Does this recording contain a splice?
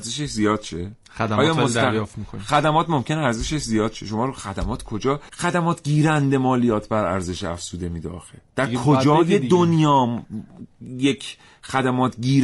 yes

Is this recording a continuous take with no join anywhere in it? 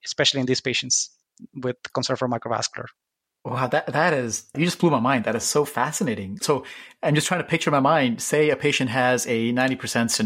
yes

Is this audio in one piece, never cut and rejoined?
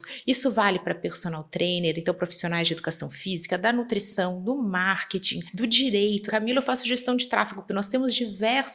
no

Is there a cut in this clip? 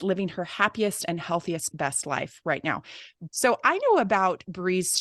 yes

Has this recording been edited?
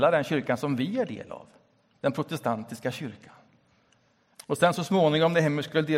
yes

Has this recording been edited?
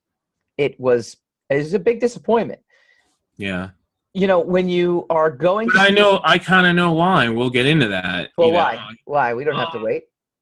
no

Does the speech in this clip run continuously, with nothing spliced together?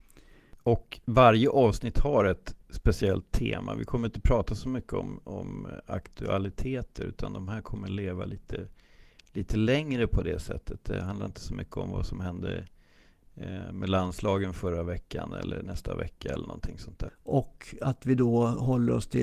no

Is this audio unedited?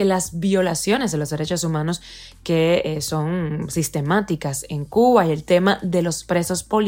yes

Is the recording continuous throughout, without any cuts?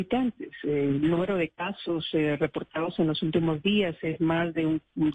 yes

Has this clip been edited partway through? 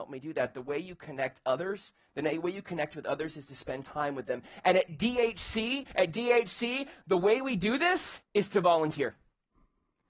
yes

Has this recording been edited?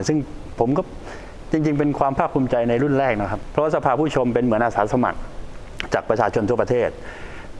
no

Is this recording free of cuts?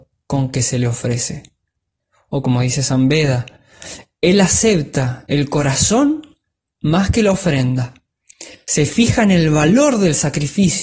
yes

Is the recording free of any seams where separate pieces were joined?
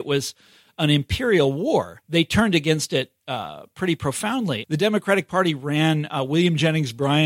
no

